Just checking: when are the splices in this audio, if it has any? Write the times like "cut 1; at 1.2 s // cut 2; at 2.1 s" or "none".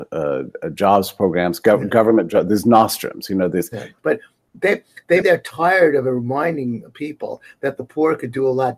cut 1; at 4.0 s // cut 2; at 5.2 s